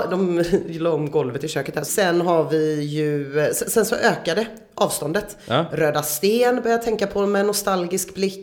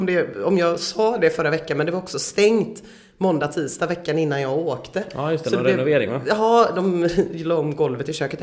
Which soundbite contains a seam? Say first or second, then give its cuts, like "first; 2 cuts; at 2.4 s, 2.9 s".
first; 1 cut; at 1.9 s